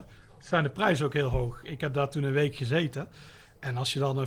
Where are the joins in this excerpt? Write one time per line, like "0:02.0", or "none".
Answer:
none